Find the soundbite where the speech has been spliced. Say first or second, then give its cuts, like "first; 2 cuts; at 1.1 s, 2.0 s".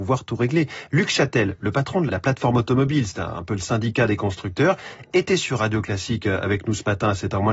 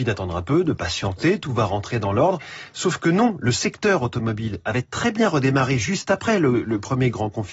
first; 1 cut; at 2.1 s